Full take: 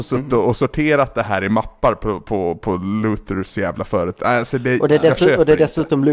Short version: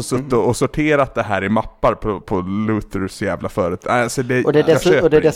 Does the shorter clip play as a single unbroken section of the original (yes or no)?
no